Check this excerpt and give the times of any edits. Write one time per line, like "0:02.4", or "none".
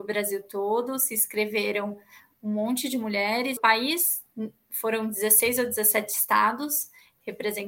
0:03.6